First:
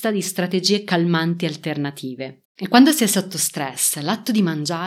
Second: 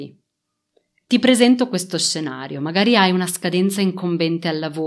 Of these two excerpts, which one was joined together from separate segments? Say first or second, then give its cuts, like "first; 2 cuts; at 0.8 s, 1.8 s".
first; 1 cut; at 2.4 s